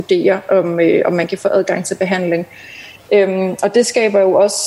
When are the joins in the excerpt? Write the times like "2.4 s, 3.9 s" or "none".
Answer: none